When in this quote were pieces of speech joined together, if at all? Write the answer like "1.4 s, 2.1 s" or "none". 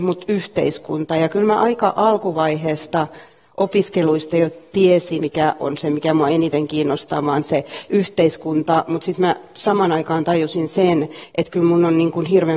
5.2 s